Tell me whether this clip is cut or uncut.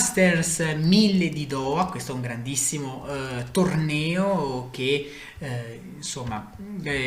uncut